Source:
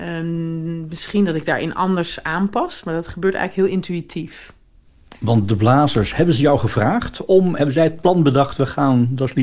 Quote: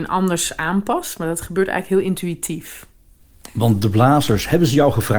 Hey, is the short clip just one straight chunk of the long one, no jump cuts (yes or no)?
yes